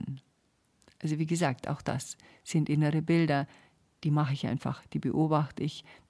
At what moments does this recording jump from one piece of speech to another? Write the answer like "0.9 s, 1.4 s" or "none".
none